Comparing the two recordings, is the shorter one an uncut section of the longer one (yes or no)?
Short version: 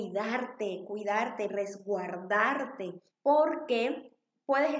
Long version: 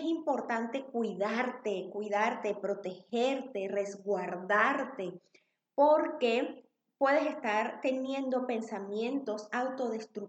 no